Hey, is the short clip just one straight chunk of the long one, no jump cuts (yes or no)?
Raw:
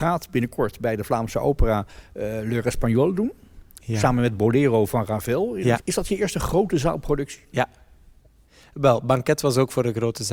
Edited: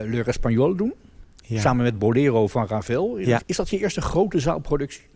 yes